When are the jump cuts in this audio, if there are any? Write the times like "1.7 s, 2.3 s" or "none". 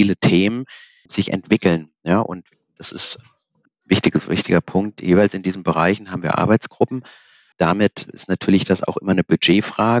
1.1 s, 3.7 s, 7.5 s